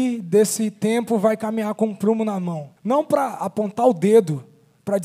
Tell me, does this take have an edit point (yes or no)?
yes